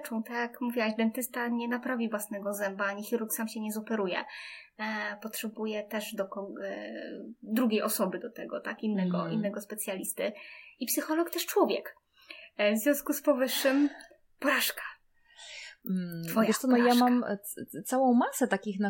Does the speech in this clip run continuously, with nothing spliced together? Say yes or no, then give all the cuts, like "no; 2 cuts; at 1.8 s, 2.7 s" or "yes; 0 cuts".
yes; 0 cuts